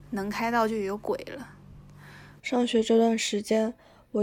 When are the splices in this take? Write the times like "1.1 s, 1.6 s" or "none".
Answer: 2.4 s